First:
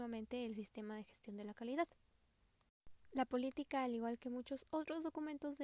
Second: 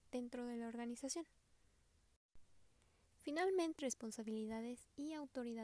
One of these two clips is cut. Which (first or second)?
second